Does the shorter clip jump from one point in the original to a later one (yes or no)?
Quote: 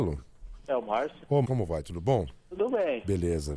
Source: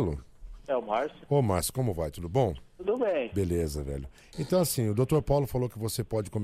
yes